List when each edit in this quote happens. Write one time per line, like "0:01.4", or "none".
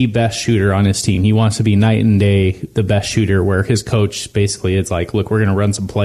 none